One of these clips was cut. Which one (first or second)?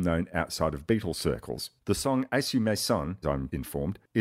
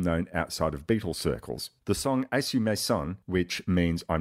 first